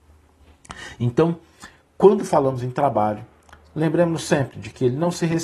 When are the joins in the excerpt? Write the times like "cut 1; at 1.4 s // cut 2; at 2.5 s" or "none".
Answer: none